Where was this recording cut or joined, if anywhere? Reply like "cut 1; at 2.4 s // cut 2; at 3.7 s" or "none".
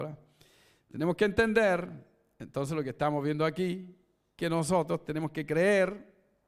none